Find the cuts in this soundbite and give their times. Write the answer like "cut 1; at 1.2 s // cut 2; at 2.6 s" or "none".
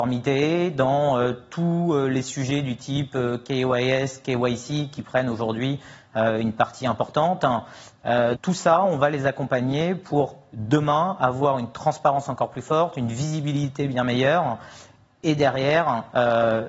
cut 1; at 8.3 s